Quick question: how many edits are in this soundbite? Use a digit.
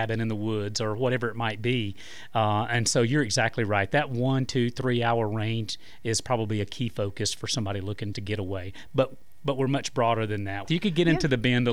2